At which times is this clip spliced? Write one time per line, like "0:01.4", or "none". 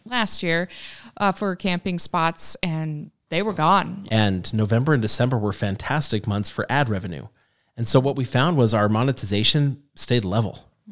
0:04.1